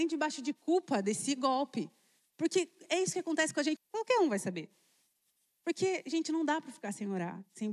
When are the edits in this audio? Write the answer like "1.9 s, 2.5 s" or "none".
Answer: 3.8 s